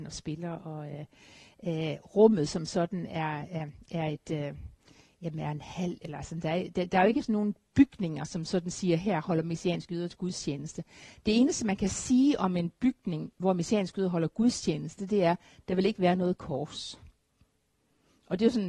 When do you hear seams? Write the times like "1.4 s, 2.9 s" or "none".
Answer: none